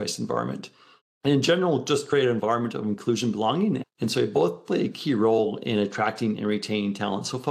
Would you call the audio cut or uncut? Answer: cut